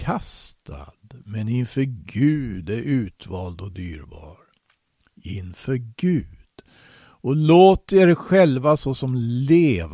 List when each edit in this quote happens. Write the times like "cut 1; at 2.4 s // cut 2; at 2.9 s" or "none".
none